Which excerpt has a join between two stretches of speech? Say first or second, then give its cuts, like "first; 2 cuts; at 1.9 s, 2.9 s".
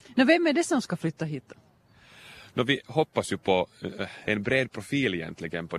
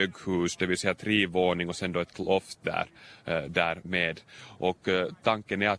first; 1 cut; at 4.2 s